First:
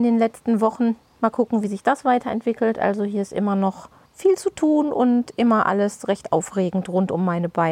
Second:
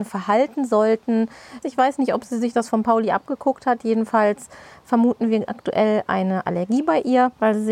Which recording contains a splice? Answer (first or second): second